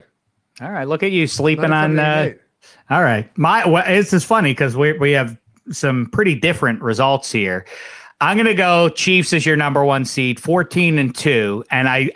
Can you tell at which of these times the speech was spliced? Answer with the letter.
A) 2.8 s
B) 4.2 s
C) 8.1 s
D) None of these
D